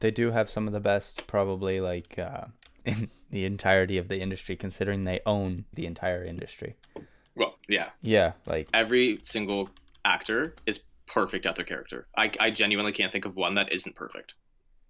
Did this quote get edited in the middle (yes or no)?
yes